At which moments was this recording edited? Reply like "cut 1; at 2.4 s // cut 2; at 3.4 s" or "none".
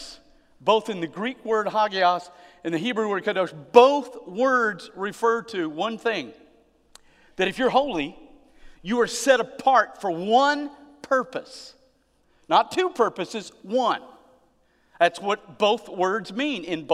none